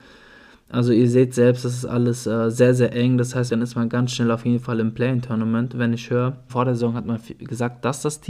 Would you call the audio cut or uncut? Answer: cut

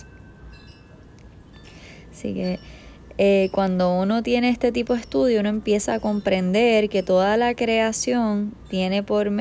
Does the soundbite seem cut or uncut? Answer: uncut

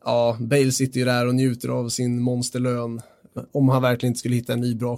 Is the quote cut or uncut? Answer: cut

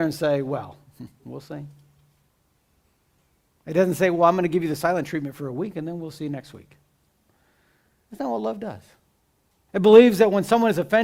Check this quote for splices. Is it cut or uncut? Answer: cut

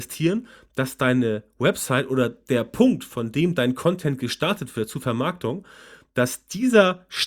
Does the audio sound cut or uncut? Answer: uncut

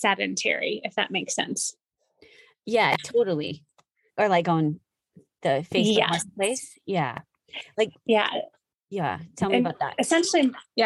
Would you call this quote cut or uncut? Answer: cut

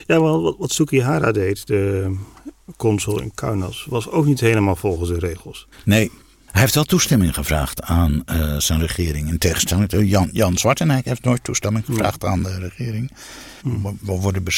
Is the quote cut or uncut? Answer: cut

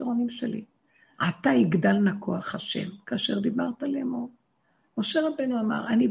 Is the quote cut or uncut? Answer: uncut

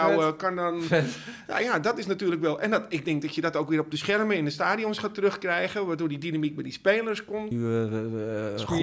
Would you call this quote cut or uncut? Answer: cut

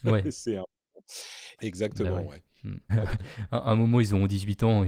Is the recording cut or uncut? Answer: cut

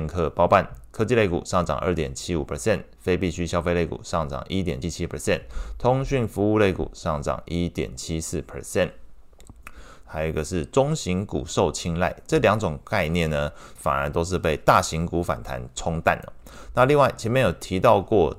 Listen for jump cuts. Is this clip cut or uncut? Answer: cut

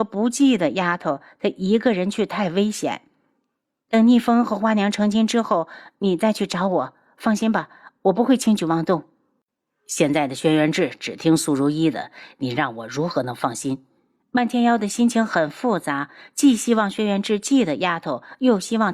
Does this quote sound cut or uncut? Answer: uncut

